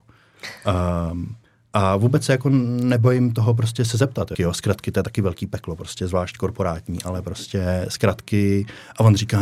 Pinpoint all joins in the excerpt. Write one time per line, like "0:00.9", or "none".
0:04.3